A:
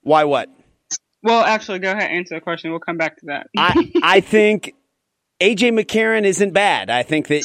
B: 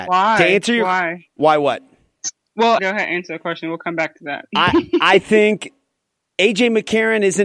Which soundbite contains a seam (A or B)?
B